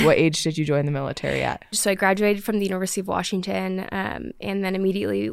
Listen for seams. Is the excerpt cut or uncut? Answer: cut